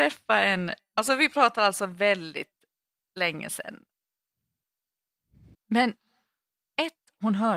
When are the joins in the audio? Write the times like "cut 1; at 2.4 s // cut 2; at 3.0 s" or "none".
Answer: cut 1; at 5.5 s